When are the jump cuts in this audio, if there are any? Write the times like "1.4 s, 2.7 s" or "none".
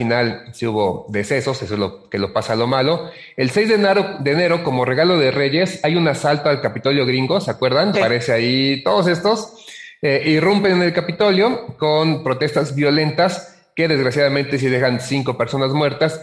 7.9 s